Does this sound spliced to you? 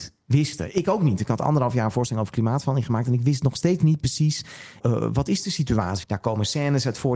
yes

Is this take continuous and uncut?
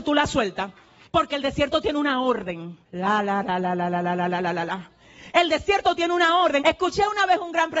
no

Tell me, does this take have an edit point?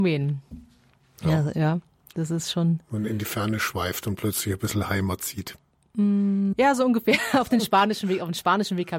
yes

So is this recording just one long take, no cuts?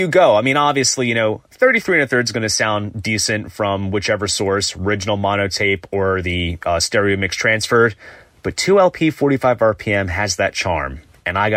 yes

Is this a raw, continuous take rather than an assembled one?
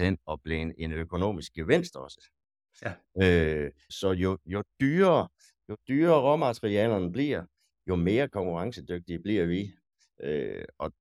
no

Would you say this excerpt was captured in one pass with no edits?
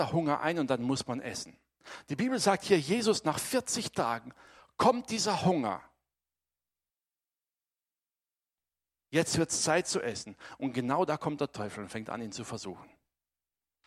yes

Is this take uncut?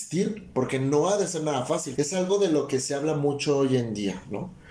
no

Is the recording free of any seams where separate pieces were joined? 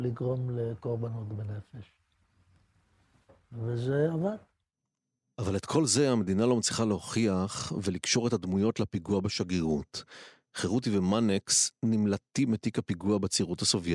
yes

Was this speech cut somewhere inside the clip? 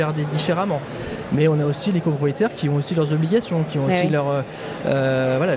no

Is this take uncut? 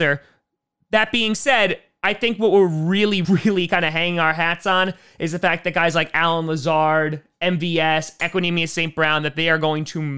no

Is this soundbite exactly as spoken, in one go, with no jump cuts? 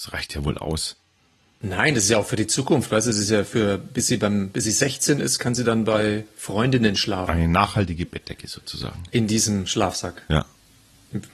yes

